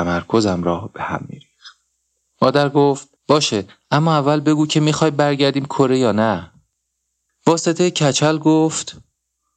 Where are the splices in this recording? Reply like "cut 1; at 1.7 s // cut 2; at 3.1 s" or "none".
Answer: cut 1; at 3.2 s // cut 2; at 7.3 s